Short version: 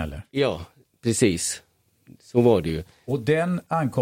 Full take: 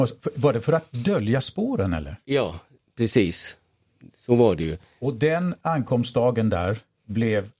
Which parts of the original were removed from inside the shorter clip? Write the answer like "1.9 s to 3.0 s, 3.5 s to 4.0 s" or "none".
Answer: none